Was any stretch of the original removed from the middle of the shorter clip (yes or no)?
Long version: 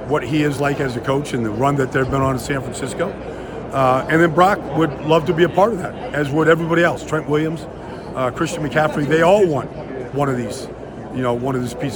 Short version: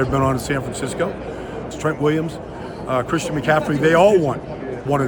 yes